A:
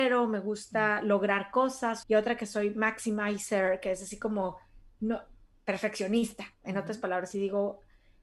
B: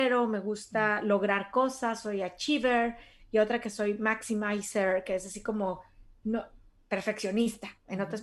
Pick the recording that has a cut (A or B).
A